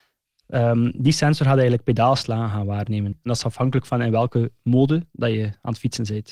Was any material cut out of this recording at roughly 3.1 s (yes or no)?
yes